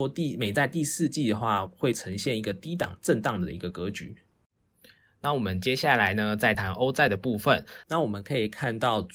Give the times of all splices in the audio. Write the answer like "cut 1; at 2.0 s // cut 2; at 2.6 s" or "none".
cut 1; at 6.5 s // cut 2; at 7.8 s